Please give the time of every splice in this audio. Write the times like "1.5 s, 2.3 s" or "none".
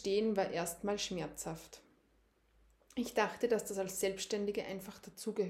none